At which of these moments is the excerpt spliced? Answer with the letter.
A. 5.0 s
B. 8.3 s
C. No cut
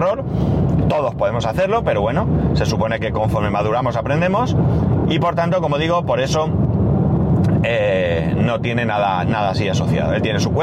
C